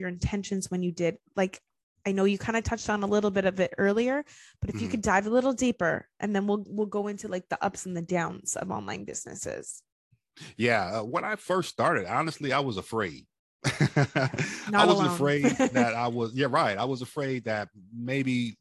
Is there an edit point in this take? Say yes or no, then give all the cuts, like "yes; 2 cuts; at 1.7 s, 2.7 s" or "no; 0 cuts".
no; 0 cuts